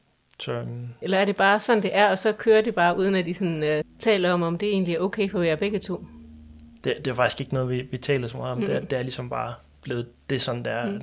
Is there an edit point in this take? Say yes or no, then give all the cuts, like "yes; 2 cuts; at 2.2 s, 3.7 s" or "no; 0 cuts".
yes; 2 cuts; at 1.0 s, 3.8 s